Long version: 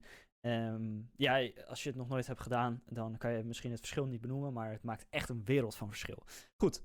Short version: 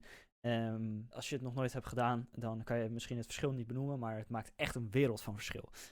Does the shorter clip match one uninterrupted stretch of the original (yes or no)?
no